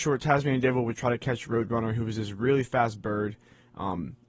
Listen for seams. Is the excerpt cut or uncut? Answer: uncut